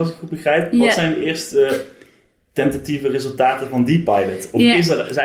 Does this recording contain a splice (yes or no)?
no